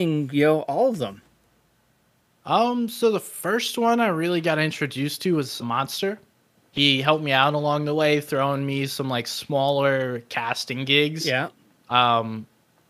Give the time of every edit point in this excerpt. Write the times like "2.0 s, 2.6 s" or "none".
5.6 s